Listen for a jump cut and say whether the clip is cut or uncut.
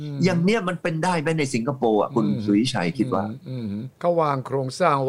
cut